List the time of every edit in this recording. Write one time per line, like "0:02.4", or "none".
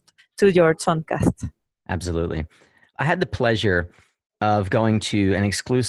none